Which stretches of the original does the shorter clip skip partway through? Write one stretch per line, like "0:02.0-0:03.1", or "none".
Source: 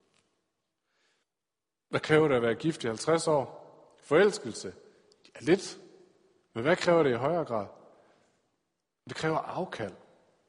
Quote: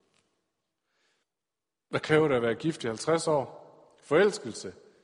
none